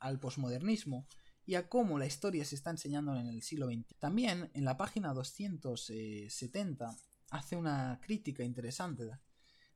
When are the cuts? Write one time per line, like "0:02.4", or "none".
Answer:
0:03.9